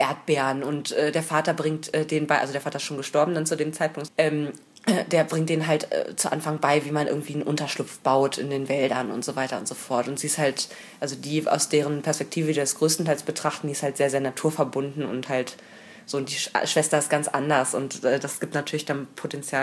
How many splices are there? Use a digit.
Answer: 1